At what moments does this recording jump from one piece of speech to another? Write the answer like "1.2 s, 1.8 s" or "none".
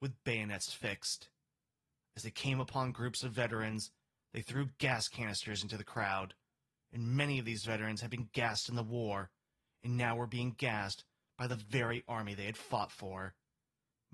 none